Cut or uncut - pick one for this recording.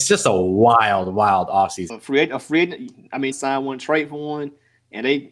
cut